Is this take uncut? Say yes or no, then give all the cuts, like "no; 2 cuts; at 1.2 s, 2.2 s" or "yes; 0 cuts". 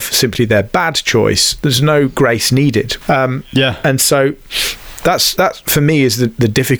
no; 2 cuts; at 3.0 s, 5.4 s